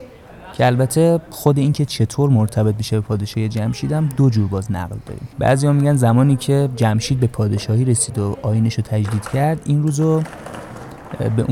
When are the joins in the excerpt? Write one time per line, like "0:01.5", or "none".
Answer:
0:05.3